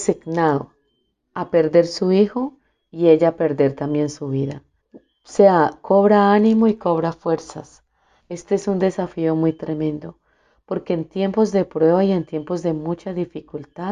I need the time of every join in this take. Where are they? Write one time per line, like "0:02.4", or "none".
0:04.8
0:08.2